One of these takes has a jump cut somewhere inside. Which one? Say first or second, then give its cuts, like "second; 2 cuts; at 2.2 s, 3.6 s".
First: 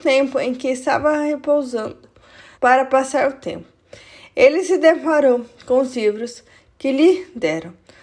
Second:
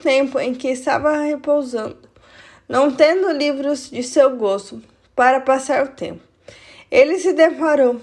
first; 1 cut; at 2.5 s